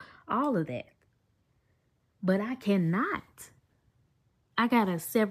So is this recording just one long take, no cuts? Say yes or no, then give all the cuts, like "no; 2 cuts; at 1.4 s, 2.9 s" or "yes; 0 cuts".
yes; 0 cuts